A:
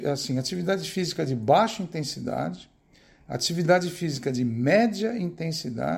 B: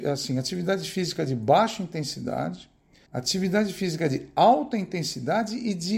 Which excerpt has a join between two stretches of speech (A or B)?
B